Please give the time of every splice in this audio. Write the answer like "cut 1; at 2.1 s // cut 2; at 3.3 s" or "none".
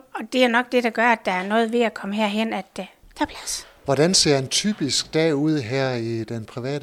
cut 1; at 3.8 s